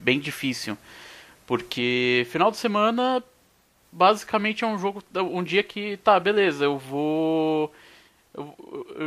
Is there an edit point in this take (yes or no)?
no